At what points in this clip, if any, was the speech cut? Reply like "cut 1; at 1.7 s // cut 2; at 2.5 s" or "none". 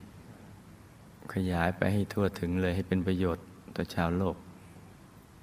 none